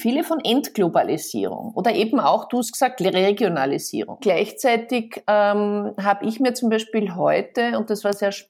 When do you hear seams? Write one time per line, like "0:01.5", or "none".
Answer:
0:04.2